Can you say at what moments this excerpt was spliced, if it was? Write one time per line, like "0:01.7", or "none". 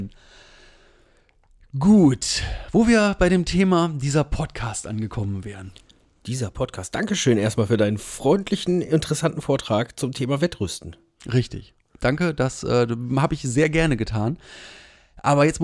none